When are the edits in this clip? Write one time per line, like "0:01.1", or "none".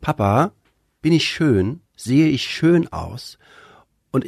0:01.9